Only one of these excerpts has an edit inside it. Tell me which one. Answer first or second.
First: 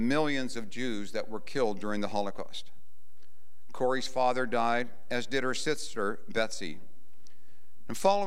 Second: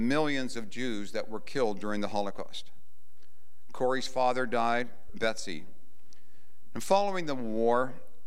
second